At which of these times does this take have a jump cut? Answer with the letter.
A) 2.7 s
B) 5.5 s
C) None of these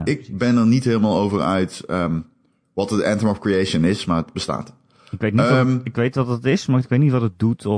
C